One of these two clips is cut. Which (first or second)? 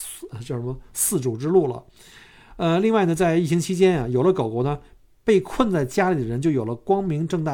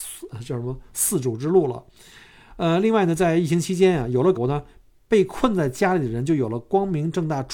second